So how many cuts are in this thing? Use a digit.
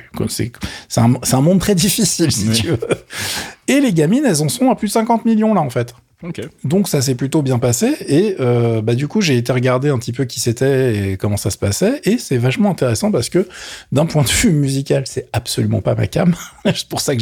0